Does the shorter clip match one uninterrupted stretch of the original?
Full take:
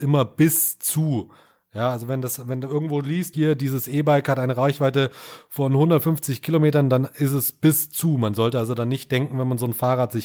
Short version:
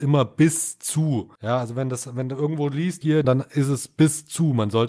no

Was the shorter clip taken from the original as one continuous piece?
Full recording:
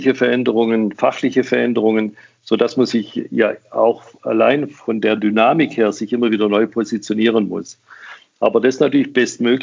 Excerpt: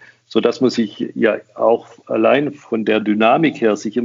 yes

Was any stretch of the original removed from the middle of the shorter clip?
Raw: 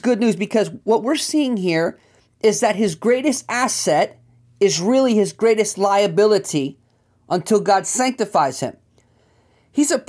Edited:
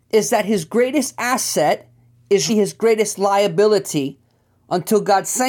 yes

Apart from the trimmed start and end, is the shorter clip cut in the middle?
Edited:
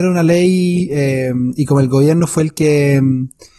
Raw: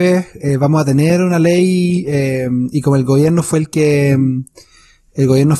no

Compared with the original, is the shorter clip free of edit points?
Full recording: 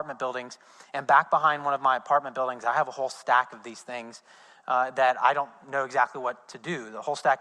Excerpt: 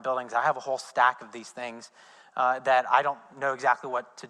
yes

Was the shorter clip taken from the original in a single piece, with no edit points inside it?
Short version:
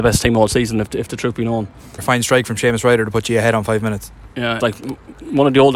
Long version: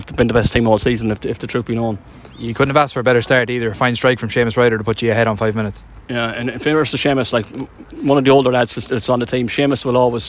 no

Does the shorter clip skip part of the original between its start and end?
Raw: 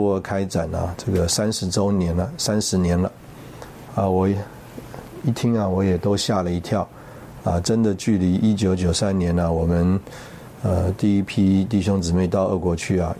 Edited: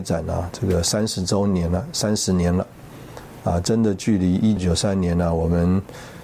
yes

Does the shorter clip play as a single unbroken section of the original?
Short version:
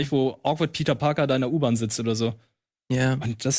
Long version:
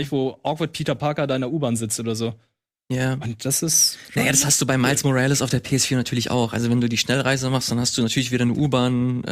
yes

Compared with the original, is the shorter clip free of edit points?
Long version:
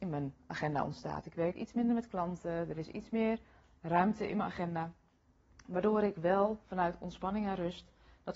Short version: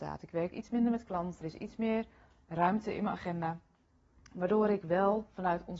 no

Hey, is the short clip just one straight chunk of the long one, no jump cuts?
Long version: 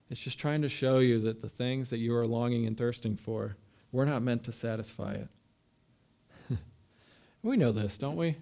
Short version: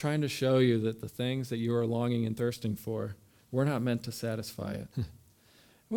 no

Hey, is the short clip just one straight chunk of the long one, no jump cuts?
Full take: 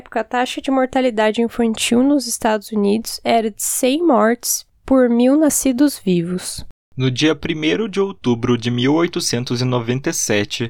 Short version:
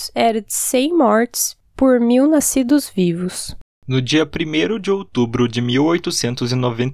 yes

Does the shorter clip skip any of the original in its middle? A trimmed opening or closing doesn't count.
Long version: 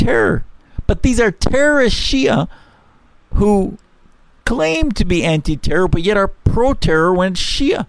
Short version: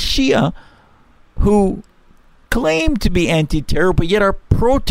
no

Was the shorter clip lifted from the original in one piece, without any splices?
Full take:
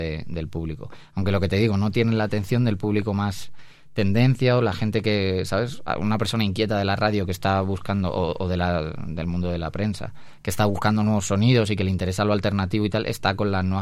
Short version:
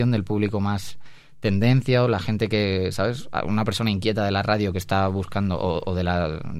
yes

